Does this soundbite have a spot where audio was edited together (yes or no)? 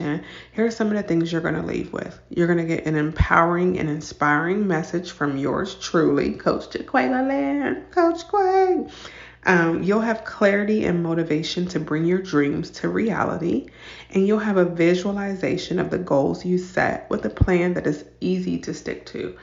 no